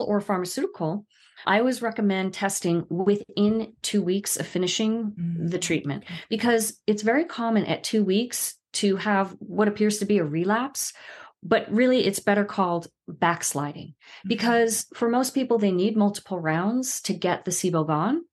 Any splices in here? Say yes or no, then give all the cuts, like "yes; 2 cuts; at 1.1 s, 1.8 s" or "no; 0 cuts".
yes; 1 cut; at 1.4 s